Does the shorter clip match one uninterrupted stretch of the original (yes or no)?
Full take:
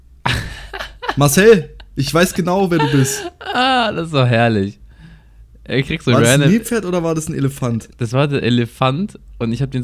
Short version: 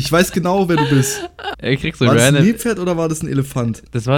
no